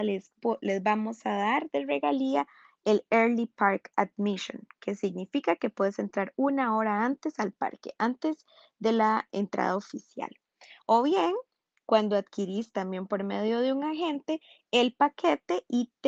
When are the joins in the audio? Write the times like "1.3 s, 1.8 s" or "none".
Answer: none

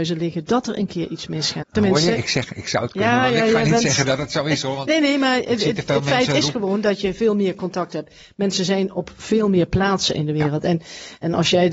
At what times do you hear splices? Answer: 1.6 s

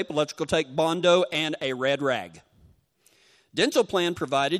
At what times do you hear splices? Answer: none

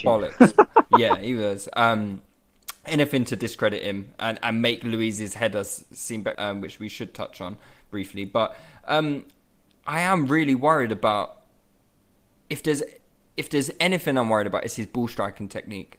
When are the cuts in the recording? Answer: 6.3 s

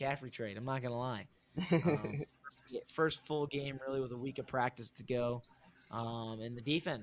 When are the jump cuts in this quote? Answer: none

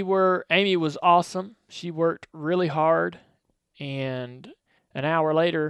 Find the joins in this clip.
none

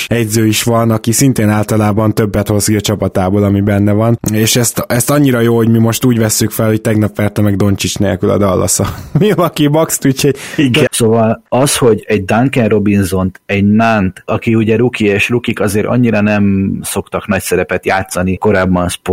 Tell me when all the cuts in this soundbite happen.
10.9 s, 14.3 s

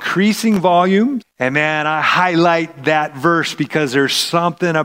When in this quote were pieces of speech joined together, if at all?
1.2 s

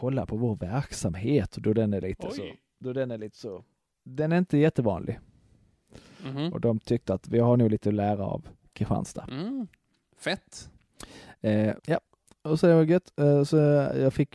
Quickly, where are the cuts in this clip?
11.8 s

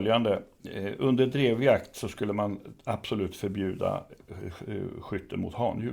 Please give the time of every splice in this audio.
none

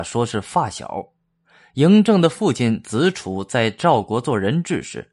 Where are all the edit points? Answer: none

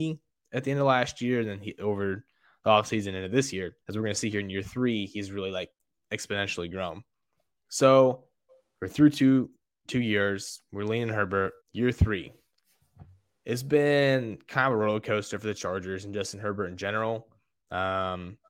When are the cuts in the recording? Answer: 3.8 s, 11.6 s

